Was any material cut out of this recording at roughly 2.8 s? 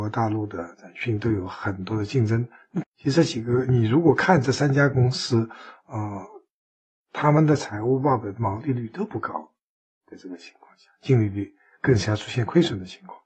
yes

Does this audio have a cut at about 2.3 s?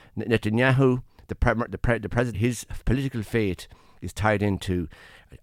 yes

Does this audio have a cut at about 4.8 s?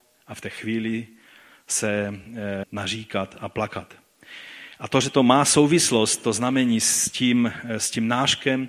no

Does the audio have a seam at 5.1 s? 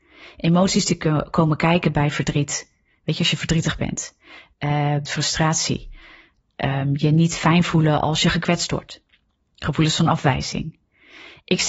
yes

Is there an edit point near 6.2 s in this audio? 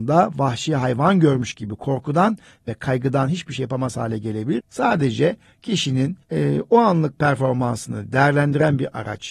yes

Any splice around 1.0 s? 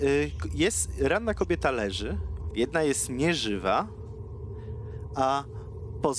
no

